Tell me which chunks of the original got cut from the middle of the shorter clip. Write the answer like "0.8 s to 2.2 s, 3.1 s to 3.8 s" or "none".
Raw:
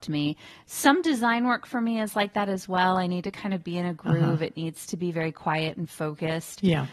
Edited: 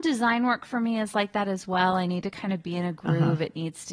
none